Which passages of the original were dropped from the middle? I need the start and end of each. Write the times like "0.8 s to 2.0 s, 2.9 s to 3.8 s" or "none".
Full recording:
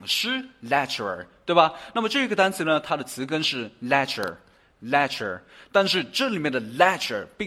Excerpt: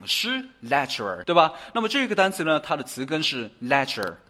1.2 s to 1.4 s